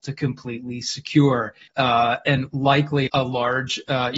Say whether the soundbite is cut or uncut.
cut